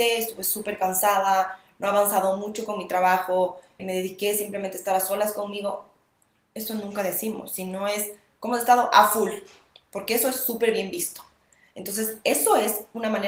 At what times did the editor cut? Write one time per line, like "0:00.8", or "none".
0:03.8